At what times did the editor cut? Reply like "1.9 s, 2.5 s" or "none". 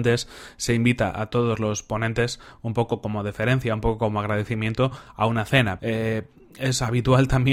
5.8 s